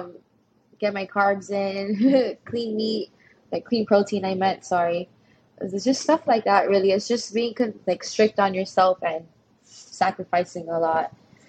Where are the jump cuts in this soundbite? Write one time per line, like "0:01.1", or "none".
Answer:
none